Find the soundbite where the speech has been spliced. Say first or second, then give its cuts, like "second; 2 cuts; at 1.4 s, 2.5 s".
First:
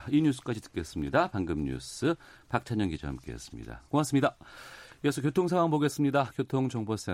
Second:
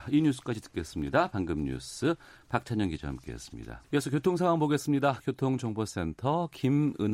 second; 1 cut; at 3.8 s